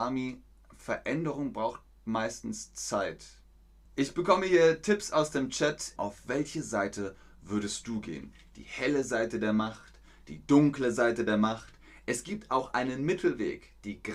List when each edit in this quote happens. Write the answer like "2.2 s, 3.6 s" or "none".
3.8 s, 6.0 s